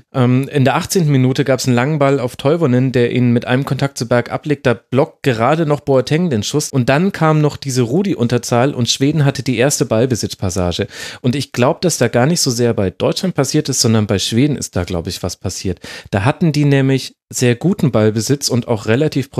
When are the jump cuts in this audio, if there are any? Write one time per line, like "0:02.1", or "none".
0:06.7